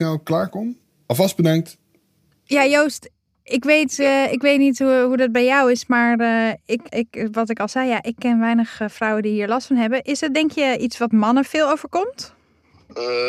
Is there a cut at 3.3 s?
no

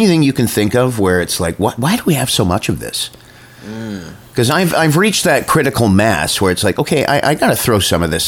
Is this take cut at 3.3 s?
no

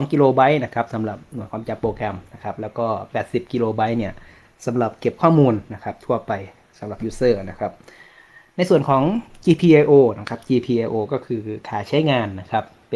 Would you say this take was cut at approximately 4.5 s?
no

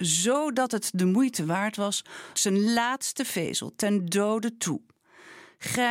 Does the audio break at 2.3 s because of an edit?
yes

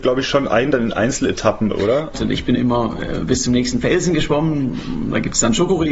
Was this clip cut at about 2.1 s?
yes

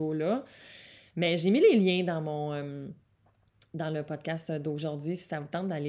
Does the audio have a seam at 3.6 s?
no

